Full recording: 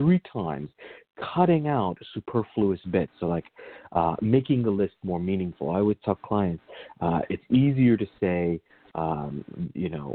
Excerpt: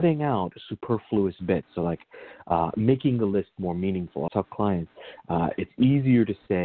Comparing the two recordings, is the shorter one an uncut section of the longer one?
no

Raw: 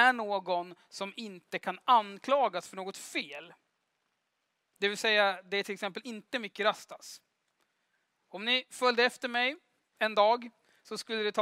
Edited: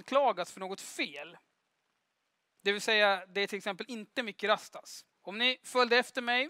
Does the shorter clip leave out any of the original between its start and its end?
yes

